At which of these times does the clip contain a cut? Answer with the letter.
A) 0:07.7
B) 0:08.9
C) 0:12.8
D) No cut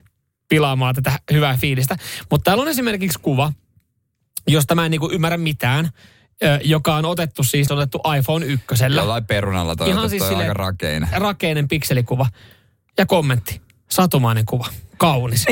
A